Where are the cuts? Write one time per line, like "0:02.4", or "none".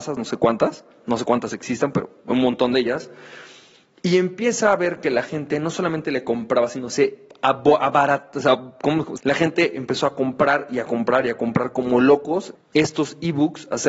0:09.2
0:12.6